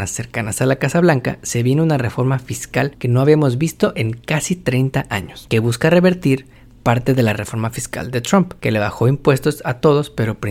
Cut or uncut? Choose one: uncut